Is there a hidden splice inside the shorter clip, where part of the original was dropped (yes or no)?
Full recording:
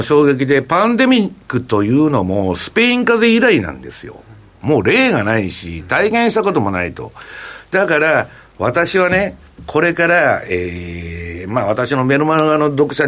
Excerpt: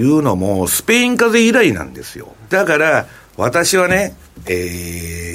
yes